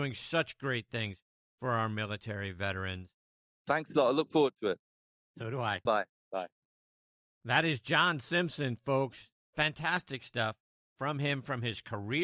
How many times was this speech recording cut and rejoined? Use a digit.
3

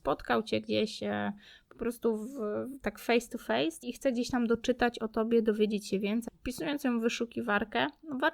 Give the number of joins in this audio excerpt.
2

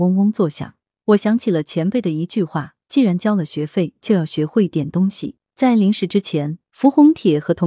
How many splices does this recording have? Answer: 1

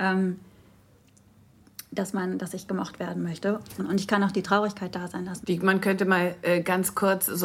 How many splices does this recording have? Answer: 2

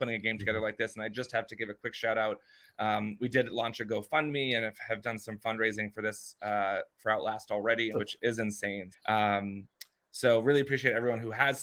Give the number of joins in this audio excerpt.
2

